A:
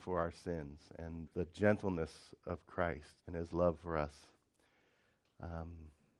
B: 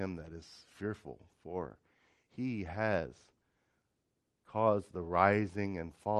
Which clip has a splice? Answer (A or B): A